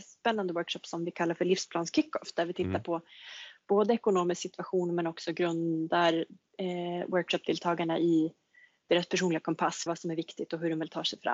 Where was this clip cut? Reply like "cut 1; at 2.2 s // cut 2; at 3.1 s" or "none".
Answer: cut 1; at 9.9 s